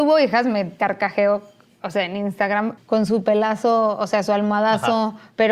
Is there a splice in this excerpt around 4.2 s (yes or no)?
no